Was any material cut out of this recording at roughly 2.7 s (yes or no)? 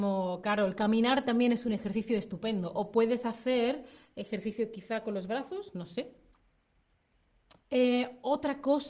no